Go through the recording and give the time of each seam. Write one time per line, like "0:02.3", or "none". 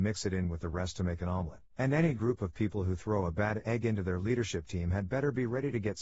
0:01.7